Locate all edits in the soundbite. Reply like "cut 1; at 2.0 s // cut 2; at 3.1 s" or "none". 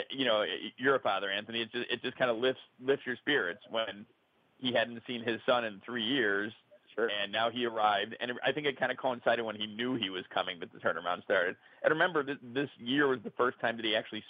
none